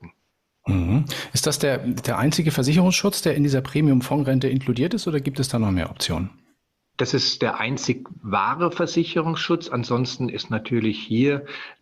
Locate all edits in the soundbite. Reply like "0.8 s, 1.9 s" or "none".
none

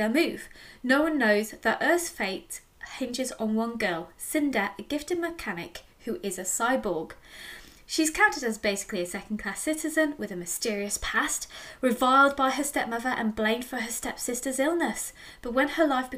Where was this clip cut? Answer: none

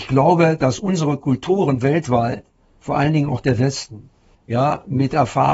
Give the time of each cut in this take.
4.3 s

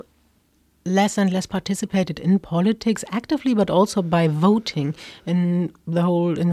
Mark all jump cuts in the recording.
none

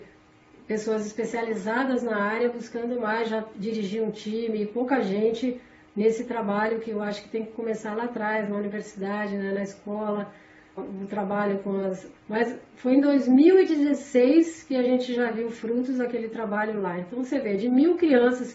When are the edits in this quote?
10.8 s, 12.2 s

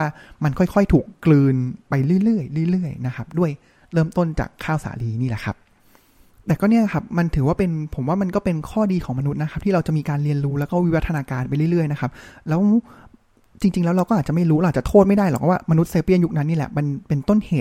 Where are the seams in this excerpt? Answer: none

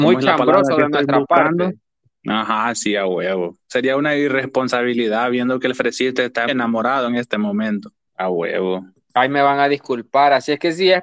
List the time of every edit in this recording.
6.5 s, 8.1 s

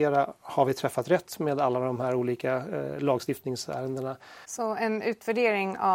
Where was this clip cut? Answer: 4.4 s

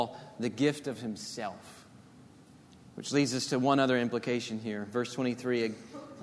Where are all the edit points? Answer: none

